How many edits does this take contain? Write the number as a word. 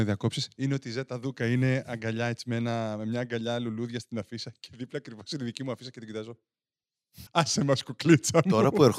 one